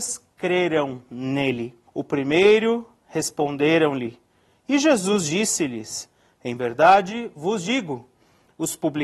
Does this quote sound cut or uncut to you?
cut